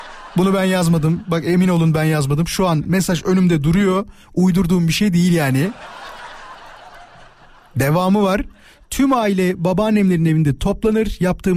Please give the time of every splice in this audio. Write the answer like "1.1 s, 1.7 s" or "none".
none